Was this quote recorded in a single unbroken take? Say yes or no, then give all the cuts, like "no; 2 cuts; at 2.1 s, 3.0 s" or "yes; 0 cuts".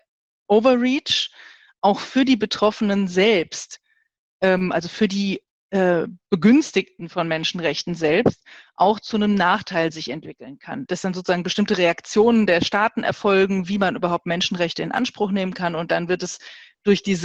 no; 1 cut; at 10.9 s